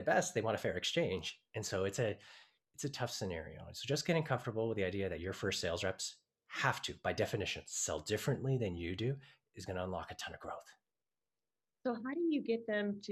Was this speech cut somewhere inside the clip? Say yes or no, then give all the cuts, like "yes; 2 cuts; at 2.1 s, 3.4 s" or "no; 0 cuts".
no; 0 cuts